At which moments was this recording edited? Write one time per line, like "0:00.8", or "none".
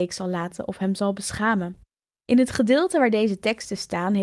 none

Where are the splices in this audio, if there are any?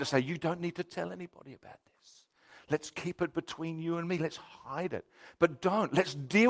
none

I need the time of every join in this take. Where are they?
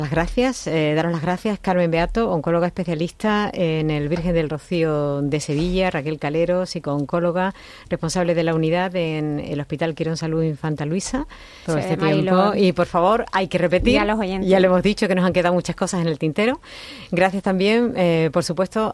0:11.7

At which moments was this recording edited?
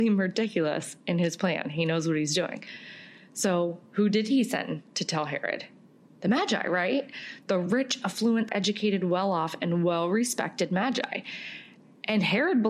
0:08.5

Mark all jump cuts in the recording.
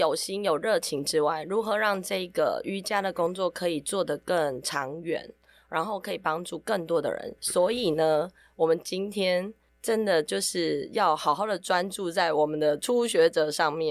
0:07.4

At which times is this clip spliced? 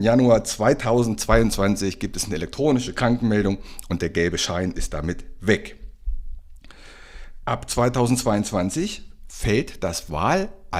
0:07.4

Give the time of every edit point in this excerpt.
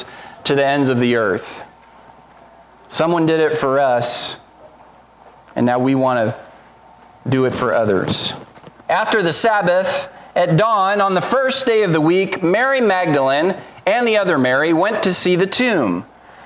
0:08.8

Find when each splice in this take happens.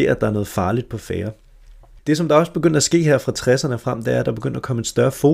0:02.0

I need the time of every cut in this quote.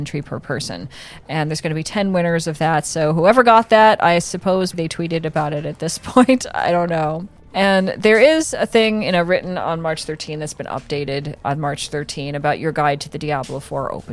0:04.7

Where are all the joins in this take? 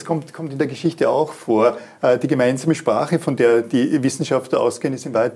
none

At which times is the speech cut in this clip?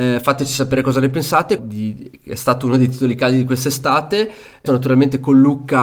0:01.6
0:04.7

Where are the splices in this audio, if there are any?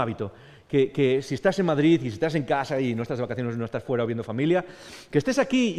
none

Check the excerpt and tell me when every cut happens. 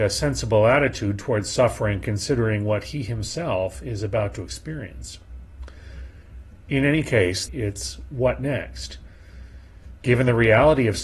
0:07.5

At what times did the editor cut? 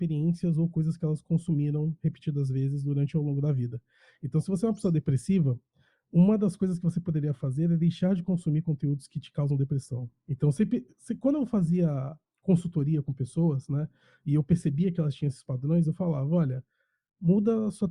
none

